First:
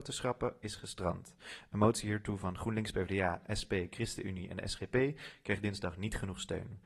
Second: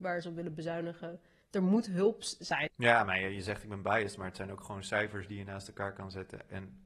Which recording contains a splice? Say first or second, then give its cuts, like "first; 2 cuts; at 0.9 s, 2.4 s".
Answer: second; 2 cuts; at 1.4 s, 2.7 s